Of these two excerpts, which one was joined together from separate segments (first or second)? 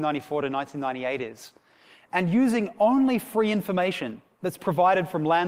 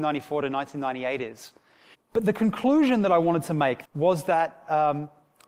second